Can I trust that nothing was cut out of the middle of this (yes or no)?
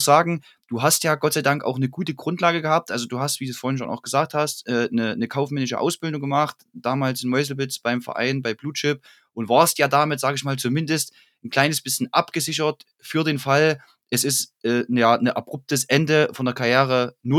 yes